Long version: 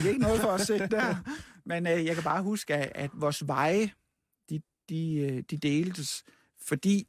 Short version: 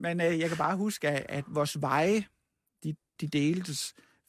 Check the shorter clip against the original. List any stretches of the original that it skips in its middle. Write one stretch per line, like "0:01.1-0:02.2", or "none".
0:04.8-0:05.5